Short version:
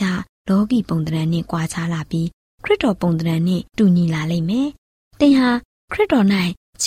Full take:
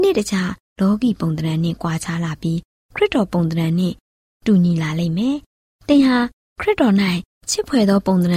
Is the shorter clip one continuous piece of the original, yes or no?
no